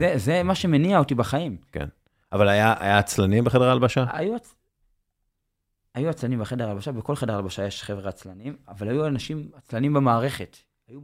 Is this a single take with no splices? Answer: yes; 0 cuts

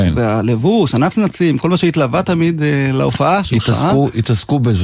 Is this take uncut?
yes; 0 cuts

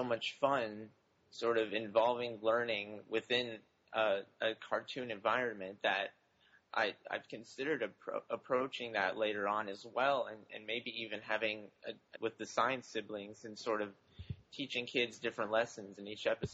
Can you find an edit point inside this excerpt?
yes; 1 cut; at 12.1 s

